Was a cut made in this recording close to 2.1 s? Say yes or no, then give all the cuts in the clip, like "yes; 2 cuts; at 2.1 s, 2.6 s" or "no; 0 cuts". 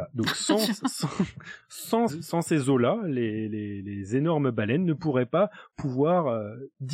yes; 1 cut; at 2.1 s